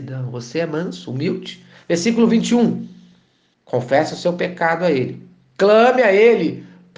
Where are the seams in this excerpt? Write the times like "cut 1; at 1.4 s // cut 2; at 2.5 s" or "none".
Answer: cut 1; at 3.5 s